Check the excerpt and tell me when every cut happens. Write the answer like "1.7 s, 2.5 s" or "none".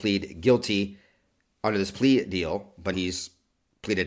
2.9 s